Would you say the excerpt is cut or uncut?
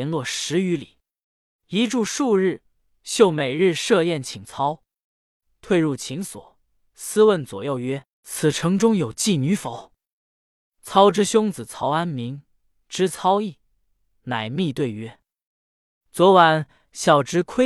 cut